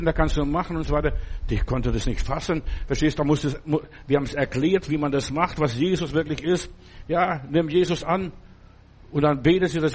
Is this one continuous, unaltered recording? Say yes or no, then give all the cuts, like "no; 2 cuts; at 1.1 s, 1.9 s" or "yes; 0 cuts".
yes; 0 cuts